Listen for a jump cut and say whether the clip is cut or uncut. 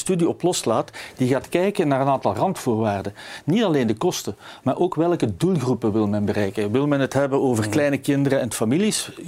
uncut